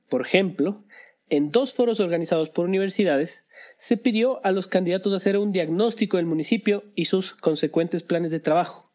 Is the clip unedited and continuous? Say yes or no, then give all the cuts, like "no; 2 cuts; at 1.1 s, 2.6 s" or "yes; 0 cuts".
yes; 0 cuts